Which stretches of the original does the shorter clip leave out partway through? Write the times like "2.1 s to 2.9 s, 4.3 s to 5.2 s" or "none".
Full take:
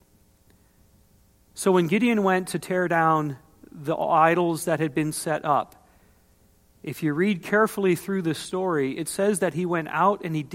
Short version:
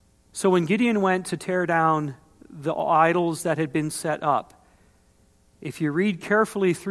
none